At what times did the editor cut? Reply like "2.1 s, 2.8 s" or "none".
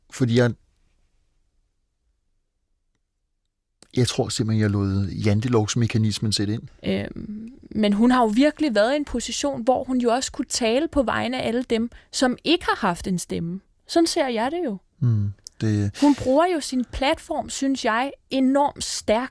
6.7 s